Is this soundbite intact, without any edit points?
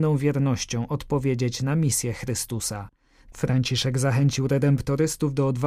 no; 1 cut; at 3.3 s

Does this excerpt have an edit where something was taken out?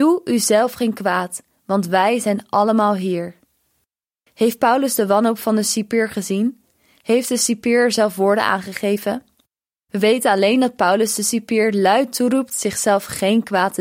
no; 0 cuts

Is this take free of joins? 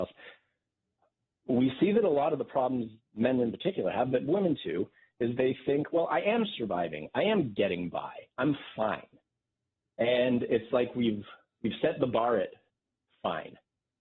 yes; 0 cuts

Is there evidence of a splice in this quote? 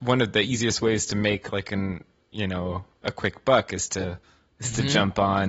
no; 0 cuts

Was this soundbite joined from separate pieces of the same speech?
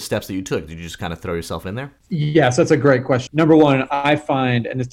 yes; 2 cuts; at 2.0 s, 3.3 s

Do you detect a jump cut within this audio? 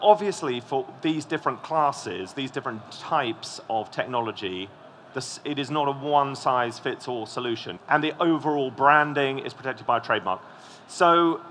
yes; 1 cut; at 7.8 s

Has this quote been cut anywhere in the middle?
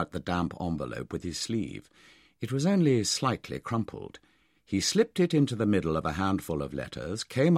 no; 0 cuts

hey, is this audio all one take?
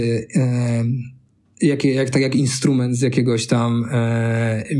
yes; 0 cuts

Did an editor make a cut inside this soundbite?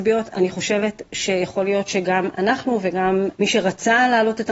yes; 1 cut; at 3.3 s

